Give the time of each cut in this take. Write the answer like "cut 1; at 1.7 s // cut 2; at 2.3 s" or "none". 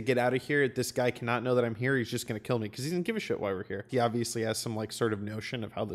cut 1; at 3.9 s